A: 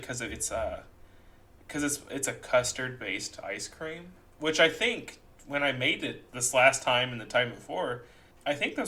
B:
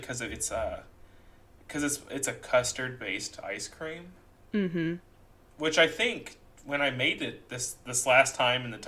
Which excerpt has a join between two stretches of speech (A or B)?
A